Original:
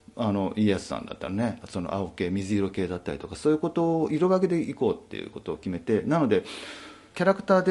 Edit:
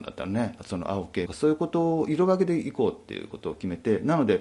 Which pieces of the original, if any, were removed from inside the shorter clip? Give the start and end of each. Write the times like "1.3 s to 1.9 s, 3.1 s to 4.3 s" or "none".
2.3 s to 3.3 s